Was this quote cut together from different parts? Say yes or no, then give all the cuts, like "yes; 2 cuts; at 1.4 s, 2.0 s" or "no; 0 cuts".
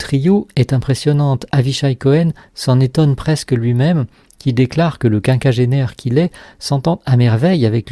no; 0 cuts